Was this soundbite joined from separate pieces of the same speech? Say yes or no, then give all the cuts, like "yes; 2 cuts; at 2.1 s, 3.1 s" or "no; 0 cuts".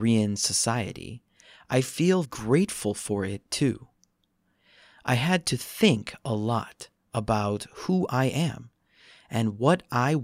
yes; 1 cut; at 2.2 s